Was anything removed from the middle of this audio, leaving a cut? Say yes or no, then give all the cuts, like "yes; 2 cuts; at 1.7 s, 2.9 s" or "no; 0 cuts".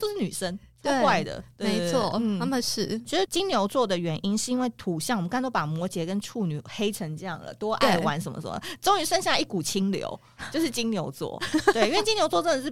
yes; 1 cut; at 3.1 s